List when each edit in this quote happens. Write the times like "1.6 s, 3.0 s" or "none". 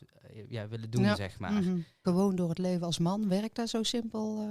2.0 s